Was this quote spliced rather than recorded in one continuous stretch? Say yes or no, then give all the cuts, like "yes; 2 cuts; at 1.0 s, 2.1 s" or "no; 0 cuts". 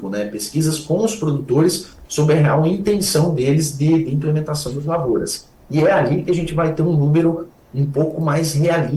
no; 0 cuts